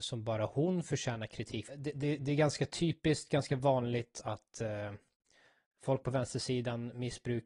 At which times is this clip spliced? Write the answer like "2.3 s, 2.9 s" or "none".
1.7 s